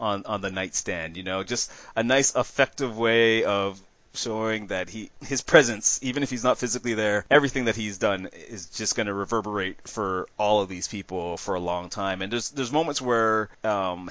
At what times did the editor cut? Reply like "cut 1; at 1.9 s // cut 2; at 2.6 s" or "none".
none